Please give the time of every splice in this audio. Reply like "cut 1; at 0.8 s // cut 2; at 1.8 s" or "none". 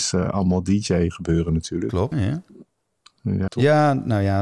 cut 1; at 2.1 s // cut 2; at 3.5 s